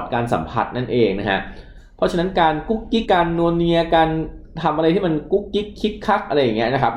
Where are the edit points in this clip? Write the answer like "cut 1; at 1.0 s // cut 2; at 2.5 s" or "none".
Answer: cut 1; at 3.0 s